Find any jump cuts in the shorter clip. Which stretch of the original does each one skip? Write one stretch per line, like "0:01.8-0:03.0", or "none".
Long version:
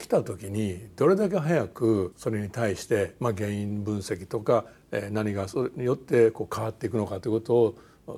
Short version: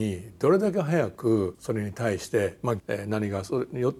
0:03.4-0:04.8